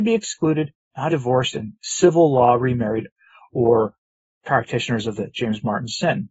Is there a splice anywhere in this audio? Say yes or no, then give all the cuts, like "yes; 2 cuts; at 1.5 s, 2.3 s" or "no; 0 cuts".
yes; 1 cut; at 1.1 s